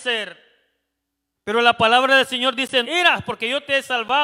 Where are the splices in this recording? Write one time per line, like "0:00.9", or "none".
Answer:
0:01.4
0:02.8